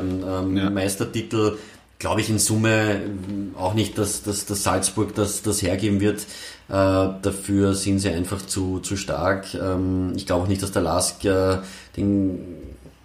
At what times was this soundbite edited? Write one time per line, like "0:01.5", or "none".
none